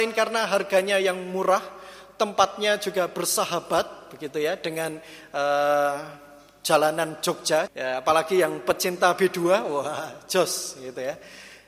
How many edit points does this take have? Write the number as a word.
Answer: one